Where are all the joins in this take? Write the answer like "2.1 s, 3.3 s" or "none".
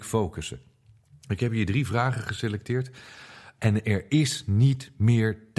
3.6 s

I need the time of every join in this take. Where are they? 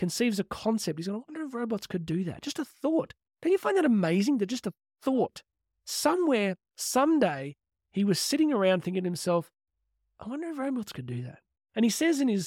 none

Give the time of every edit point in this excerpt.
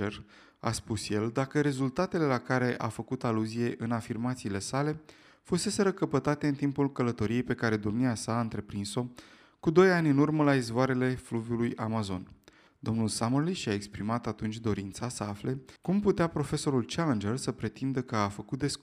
12.7 s, 15.8 s

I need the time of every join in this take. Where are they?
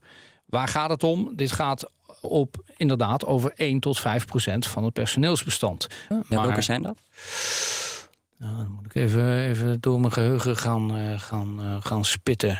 6.1 s

